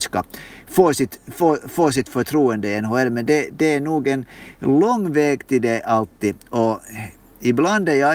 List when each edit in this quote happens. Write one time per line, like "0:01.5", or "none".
none